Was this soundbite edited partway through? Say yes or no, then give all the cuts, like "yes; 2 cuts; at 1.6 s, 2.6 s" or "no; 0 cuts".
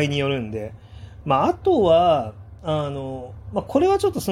yes; 1 cut; at 1.2 s